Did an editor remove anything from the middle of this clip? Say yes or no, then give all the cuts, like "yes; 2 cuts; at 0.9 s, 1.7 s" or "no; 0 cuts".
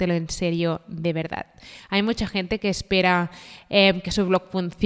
no; 0 cuts